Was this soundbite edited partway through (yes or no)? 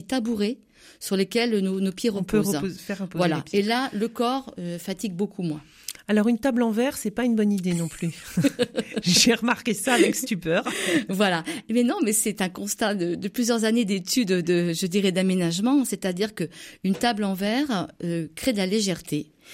no